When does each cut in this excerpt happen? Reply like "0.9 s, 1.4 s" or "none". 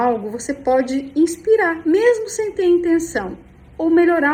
none

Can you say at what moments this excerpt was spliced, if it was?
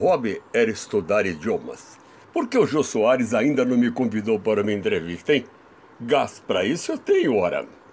2.2 s

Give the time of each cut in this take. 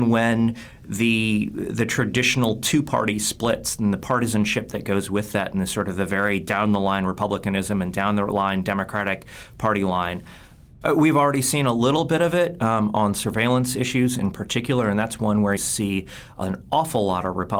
10.8 s, 15.6 s

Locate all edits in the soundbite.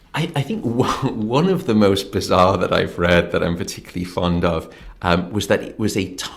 none

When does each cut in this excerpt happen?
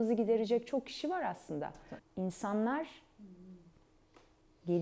2.0 s

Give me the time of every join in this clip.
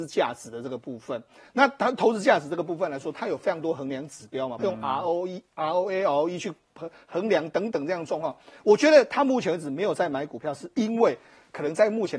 4.6 s

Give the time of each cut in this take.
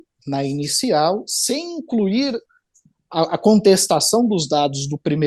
none

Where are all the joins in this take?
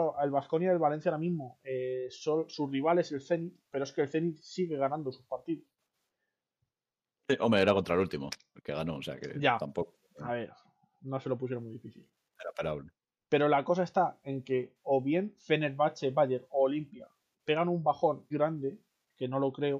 18.3 s

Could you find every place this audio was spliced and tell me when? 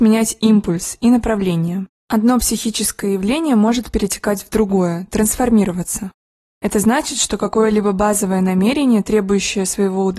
2.0 s

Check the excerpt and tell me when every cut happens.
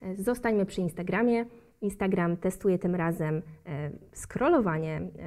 none

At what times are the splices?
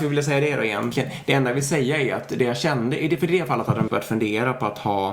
3.9 s

